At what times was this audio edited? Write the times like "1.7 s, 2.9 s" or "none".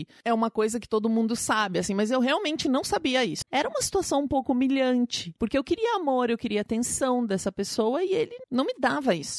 3.4 s

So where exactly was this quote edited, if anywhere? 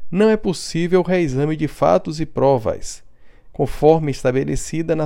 3.5 s

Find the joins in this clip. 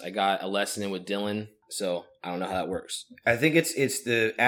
1.6 s

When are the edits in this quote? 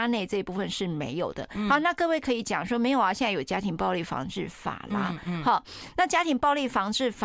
none

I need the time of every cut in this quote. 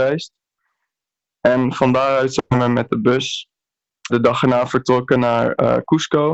4.1 s

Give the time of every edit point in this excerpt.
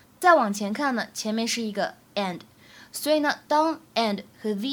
none

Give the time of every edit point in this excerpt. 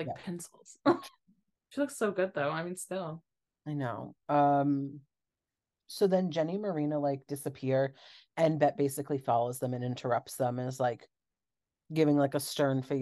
1.6 s

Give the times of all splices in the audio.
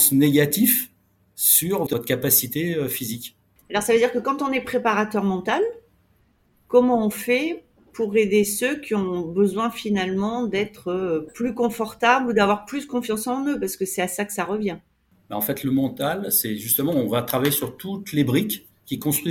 1.9 s

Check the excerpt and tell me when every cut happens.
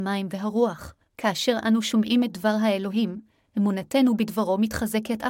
1.1 s

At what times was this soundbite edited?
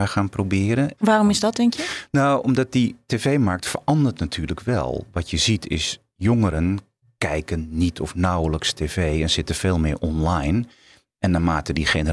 1.0 s

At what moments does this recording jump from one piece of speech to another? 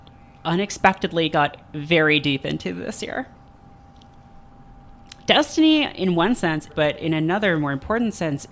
5.2 s, 6.7 s

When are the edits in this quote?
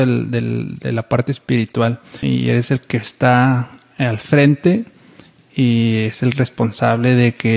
2.2 s

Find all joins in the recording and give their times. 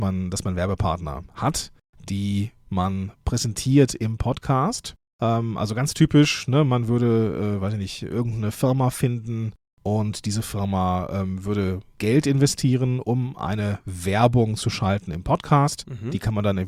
none

